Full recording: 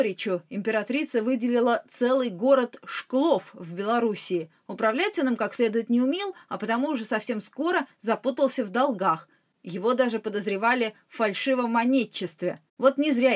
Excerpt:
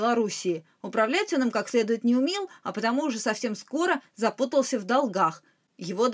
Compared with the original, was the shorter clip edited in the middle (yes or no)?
no